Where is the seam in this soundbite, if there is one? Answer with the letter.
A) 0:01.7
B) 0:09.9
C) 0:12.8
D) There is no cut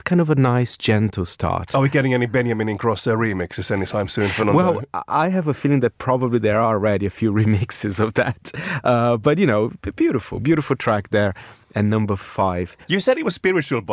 C